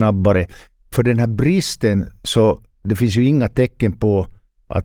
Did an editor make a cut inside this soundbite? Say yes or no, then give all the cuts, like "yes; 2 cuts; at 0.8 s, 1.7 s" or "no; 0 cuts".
no; 0 cuts